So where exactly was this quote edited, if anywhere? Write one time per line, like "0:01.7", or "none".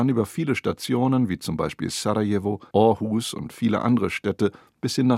0:02.7